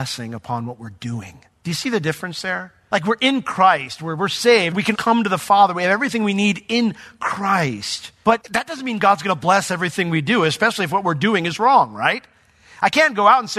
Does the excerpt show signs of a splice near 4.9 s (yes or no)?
yes